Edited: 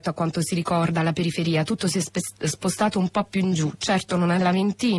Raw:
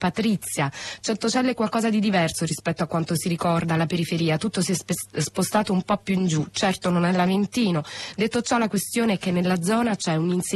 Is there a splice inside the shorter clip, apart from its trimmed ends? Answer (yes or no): no